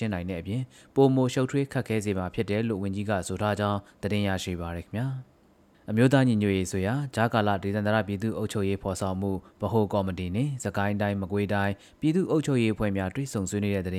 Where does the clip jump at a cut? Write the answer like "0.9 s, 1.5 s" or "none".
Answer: none